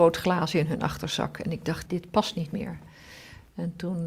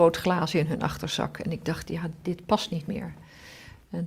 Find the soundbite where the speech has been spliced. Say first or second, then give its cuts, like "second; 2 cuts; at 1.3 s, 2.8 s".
first; 1 cut; at 1.8 s